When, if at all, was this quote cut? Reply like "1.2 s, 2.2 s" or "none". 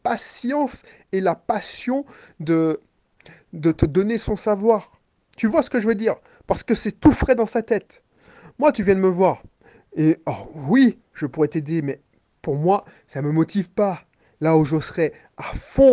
none